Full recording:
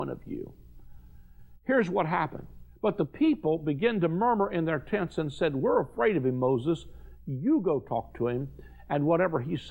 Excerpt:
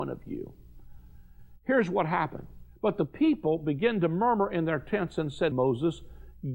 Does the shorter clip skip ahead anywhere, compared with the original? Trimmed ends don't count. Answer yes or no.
yes